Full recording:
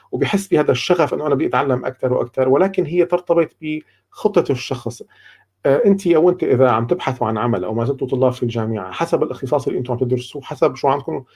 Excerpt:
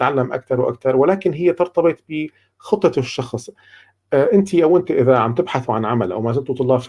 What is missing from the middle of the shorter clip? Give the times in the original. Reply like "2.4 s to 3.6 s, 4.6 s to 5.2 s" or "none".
none